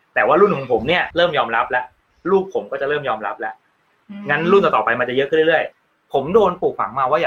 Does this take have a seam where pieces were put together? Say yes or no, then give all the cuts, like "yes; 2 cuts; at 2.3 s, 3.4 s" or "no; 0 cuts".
yes; 2 cuts; at 1.1 s, 5.7 s